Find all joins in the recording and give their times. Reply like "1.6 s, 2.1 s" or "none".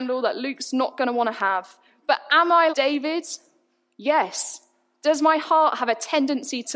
2.7 s

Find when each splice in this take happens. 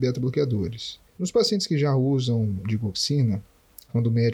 1.1 s

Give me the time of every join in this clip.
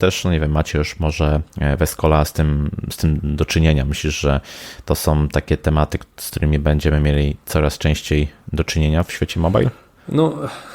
none

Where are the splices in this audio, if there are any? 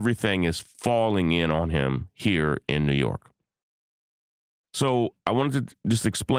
none

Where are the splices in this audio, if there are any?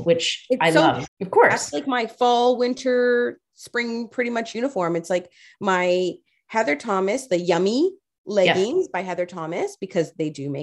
1.1 s

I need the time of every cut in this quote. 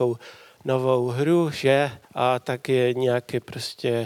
2.0 s

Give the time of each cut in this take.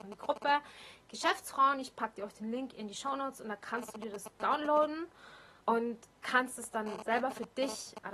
5.6 s

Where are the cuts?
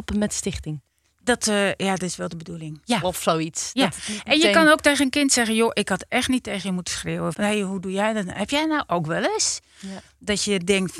2.8 s, 7.3 s

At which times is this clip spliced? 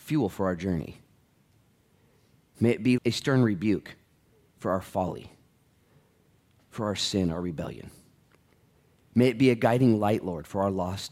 3.0 s

